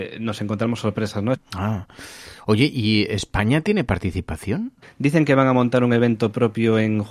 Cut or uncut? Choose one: cut